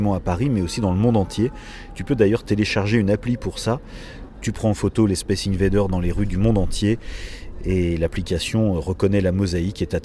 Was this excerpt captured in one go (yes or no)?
yes